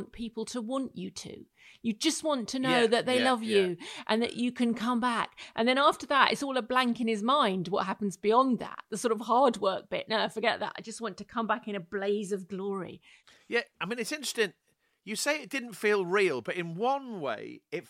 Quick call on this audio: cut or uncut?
uncut